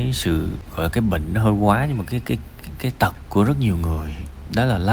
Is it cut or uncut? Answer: uncut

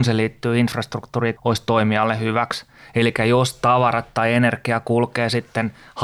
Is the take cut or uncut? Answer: cut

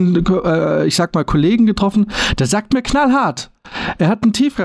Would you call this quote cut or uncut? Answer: uncut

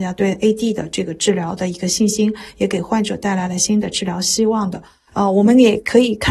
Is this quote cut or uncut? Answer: uncut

